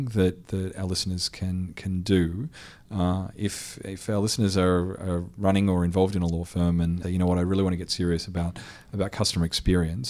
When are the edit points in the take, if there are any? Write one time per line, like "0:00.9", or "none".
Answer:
0:07.0